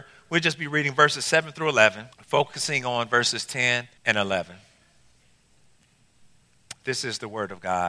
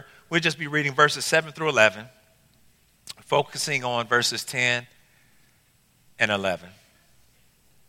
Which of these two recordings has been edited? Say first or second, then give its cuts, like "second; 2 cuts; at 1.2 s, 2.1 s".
first; 2 cuts; at 2.1 s, 4.0 s